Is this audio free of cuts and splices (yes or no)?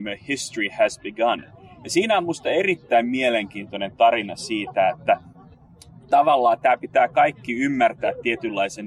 yes